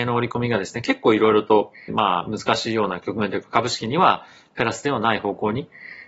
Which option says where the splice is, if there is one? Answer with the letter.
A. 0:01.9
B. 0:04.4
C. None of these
A